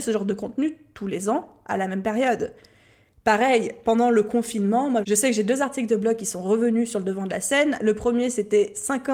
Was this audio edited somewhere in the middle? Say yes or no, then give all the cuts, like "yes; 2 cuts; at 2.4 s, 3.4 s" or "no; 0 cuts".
no; 0 cuts